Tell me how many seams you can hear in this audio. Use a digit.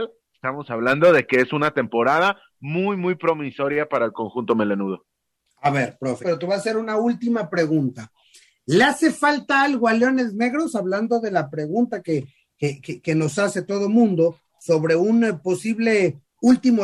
1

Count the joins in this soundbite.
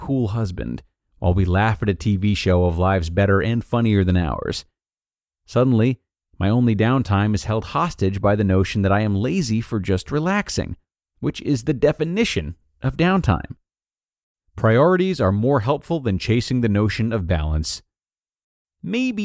0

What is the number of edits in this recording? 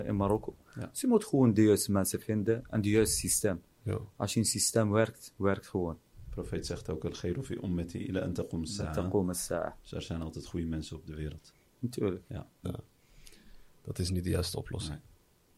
1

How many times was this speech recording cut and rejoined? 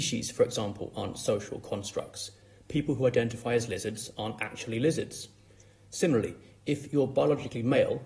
0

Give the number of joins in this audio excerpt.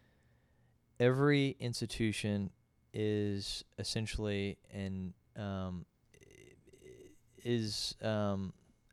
0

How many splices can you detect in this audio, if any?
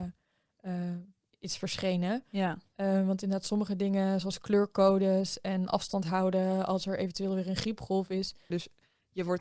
1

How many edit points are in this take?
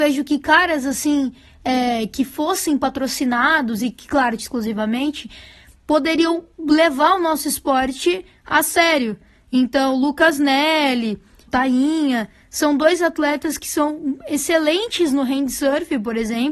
2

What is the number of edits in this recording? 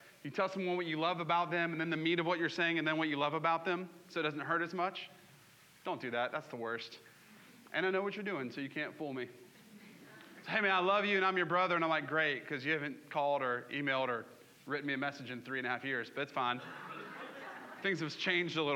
0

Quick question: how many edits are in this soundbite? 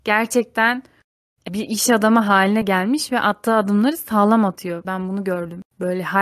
2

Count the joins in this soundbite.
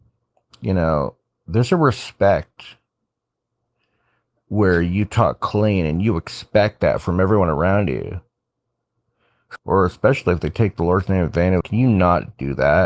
2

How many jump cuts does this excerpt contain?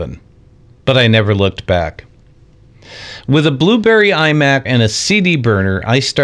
1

